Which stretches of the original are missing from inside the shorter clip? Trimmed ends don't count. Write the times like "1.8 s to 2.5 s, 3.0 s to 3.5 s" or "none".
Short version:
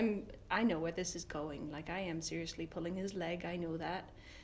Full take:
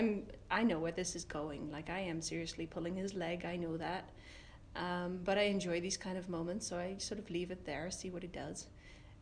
none